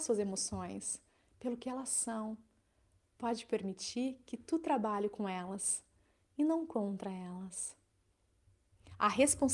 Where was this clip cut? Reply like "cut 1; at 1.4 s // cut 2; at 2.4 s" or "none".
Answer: none